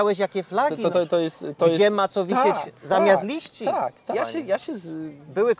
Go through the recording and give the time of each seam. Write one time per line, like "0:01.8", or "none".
0:00.9
0:04.1